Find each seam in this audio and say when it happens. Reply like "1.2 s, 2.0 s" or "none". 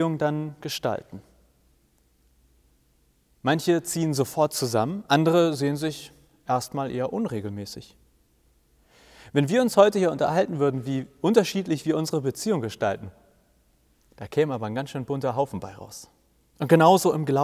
none